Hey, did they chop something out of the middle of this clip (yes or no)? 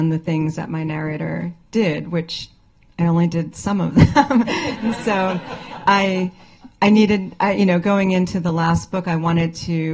no